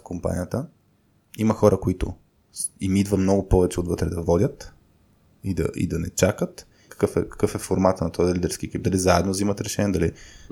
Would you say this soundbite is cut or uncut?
cut